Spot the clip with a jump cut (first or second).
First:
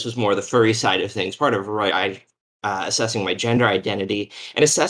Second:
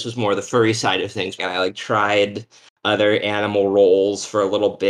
second